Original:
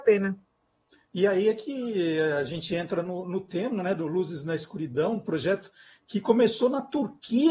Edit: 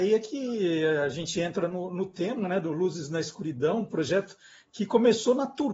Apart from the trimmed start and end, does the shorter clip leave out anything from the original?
no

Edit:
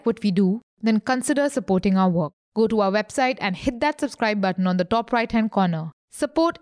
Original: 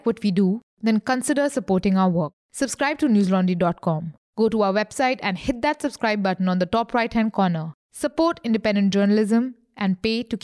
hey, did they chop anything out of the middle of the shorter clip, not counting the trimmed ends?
yes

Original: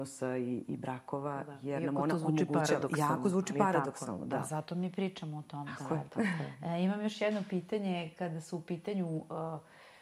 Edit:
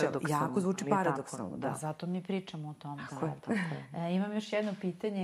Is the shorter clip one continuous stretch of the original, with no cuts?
yes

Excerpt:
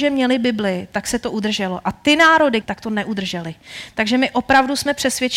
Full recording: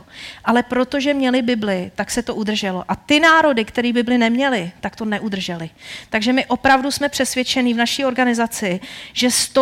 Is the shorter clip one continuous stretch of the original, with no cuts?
no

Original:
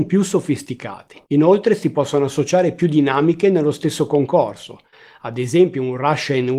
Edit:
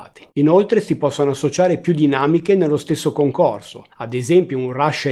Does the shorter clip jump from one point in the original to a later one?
yes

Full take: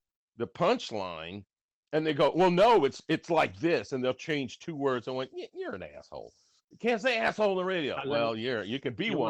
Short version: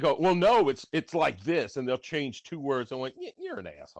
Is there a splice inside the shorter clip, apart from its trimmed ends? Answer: no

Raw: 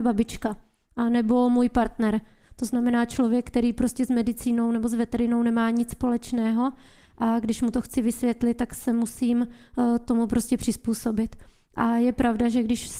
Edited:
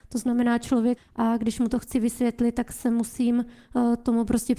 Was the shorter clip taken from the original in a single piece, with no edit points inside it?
no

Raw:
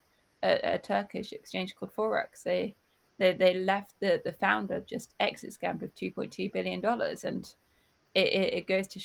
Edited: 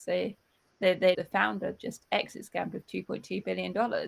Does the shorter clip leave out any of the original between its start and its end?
yes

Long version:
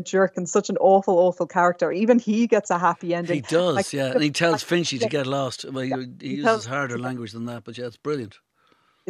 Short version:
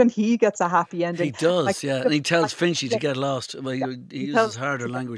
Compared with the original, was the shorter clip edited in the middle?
no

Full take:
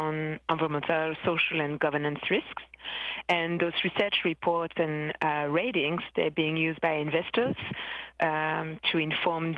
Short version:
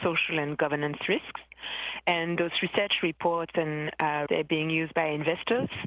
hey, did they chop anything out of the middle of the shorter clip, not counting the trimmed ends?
yes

